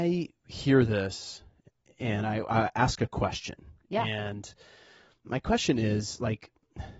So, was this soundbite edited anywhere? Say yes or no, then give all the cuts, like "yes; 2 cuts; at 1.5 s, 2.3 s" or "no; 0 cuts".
no; 0 cuts